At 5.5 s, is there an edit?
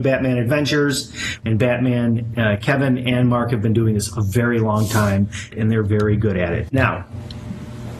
yes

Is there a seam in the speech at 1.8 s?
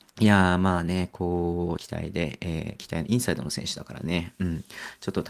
yes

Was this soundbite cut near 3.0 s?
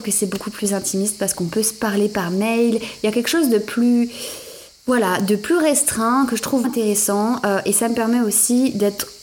no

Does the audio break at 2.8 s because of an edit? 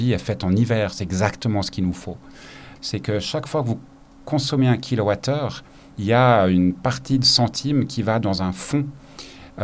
yes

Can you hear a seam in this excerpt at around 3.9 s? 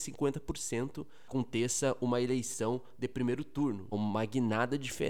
yes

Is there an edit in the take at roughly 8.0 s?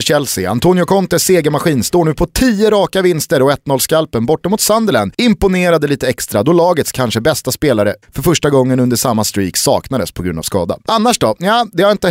yes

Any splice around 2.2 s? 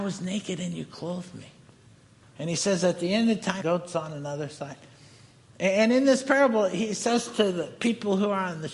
yes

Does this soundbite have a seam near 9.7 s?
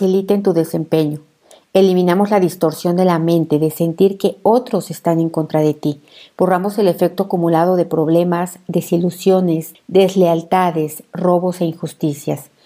yes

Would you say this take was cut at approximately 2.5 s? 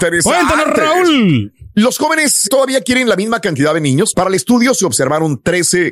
yes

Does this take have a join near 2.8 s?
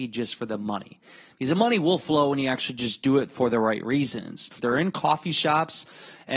no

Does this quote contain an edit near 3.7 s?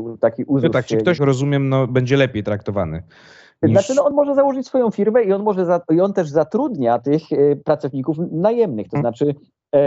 no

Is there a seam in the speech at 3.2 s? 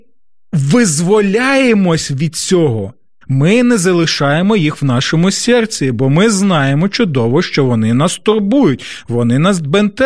yes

